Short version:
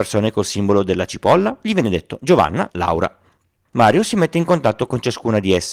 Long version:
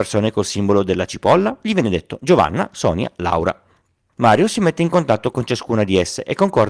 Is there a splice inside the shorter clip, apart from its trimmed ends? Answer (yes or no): yes